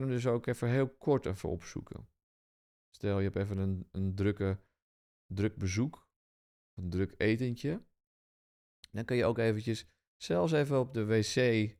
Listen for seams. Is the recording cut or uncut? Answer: uncut